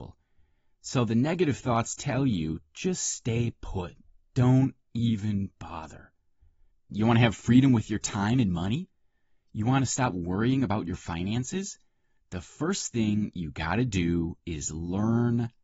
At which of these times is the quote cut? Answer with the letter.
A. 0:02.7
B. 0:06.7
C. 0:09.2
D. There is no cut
B